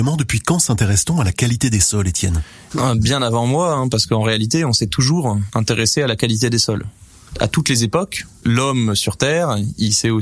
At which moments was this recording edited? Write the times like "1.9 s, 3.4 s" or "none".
none